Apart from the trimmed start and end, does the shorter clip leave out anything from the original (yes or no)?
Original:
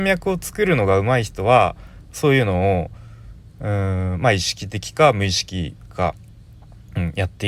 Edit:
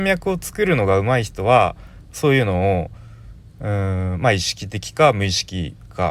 no